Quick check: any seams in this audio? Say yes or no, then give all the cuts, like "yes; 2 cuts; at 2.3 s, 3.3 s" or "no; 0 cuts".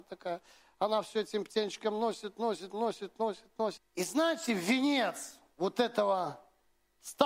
yes; 1 cut; at 3.8 s